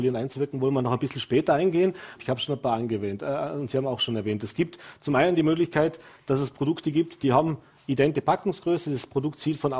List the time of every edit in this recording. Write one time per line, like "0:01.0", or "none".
0:02.2